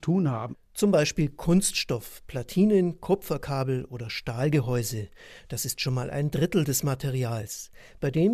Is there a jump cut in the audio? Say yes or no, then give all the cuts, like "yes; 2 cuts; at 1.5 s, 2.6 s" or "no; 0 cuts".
no; 0 cuts